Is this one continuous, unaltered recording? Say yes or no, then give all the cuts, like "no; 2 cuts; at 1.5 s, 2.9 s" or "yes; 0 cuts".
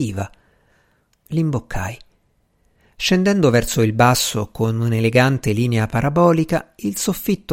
no; 1 cut; at 1.1 s